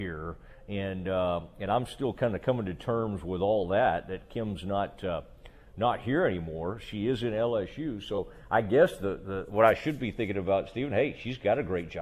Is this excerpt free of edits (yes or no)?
yes